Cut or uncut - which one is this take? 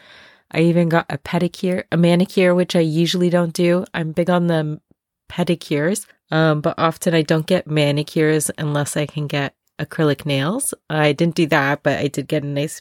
cut